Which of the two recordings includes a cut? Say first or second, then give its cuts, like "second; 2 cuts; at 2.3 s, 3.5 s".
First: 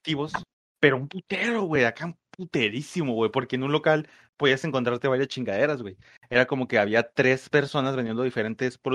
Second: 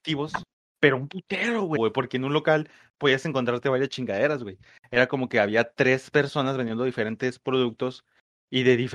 second; 1 cut; at 1.8 s